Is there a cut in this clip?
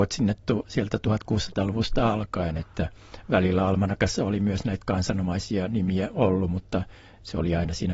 no; 0 cuts

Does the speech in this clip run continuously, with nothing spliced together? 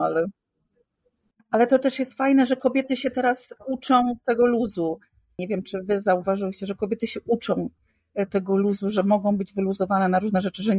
no; 1 cut; at 5.4 s

